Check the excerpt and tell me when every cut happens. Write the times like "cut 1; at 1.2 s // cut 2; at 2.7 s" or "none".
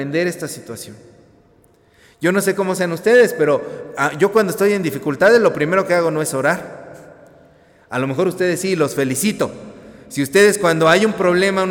none